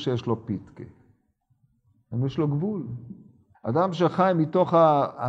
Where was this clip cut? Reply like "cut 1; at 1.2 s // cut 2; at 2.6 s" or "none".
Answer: cut 1; at 3.5 s

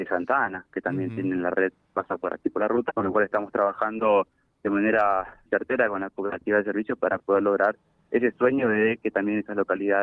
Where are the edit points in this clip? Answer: cut 1; at 2.9 s // cut 2; at 5.5 s

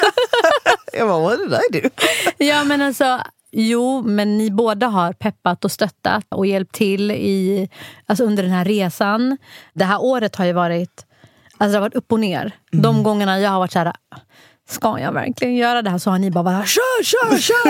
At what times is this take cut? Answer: cut 1; at 6.3 s

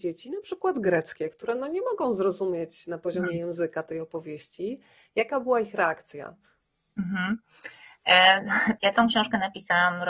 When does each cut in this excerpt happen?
cut 1; at 8.8 s

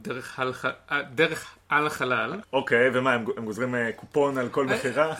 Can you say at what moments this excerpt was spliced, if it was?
cut 1; at 2.4 s

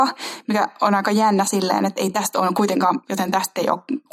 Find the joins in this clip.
cut 1; at 3.0 s

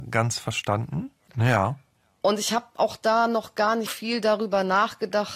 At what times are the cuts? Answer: cut 1; at 1.3 s // cut 2; at 3.9 s

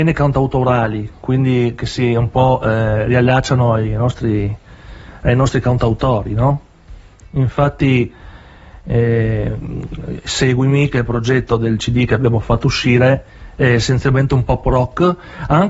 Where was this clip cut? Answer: cut 1; at 7.2 s

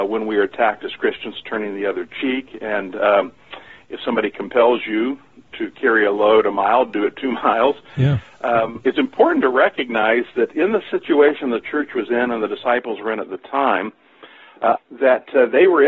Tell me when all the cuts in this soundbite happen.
cut 1; at 14.8 s

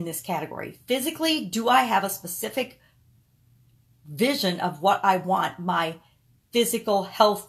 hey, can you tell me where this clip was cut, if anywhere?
none

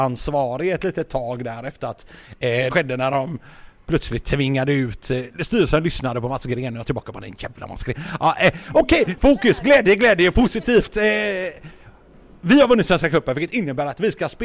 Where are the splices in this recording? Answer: cut 1; at 2.7 s // cut 2; at 9.2 s

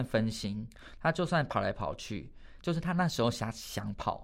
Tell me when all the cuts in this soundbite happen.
cut 1; at 2.6 s

